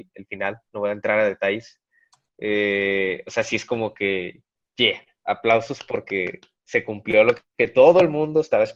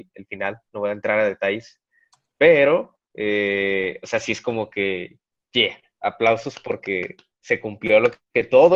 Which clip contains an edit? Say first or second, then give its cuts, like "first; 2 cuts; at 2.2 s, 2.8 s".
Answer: first; 1 cut; at 2.3 s